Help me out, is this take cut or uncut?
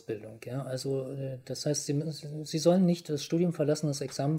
uncut